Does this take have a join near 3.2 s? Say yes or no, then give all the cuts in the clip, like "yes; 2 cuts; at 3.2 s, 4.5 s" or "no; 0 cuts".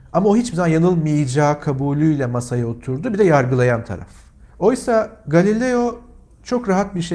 no; 1 cut; at 4.5 s